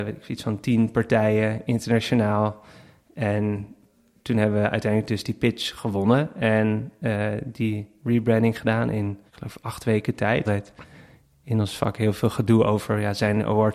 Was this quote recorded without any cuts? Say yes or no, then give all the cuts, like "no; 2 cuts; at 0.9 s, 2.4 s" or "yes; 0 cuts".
no; 2 cuts; at 9.3 s, 10.4 s